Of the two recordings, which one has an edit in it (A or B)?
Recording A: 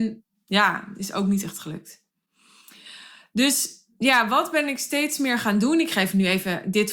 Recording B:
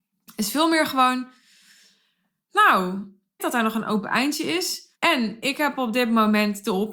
B